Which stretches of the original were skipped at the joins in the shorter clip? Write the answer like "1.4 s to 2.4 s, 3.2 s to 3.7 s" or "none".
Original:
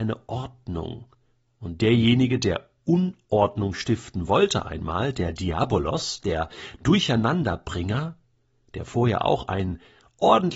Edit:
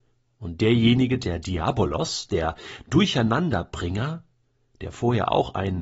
2.4 s to 5.1 s